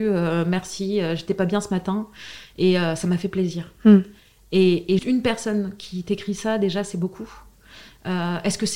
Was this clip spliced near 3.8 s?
no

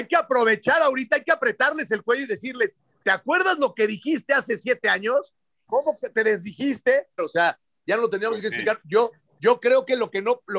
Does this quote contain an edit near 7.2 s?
yes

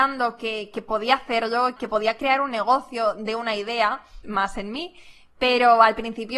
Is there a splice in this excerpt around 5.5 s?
no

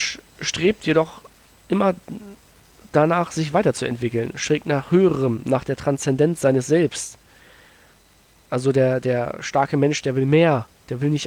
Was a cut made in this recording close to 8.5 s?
no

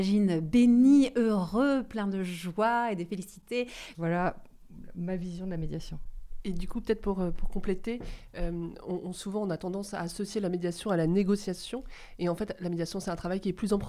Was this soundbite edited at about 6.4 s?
no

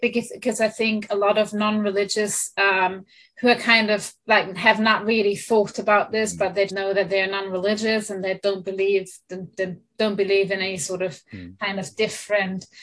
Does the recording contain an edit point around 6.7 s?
yes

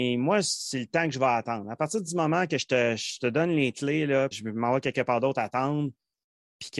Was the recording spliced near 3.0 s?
no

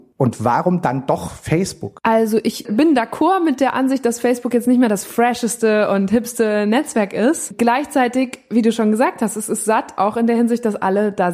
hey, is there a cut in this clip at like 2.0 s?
no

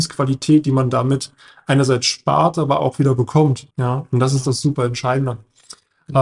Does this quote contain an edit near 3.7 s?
yes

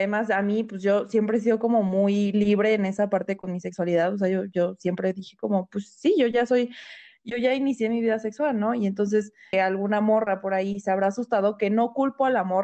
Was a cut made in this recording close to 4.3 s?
no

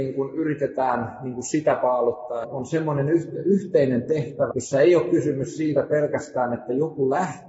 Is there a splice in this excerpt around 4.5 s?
yes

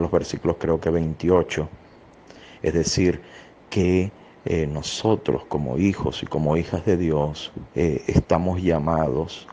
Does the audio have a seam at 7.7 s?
yes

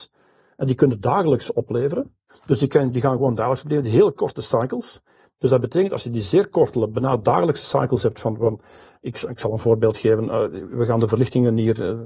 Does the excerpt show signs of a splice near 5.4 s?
no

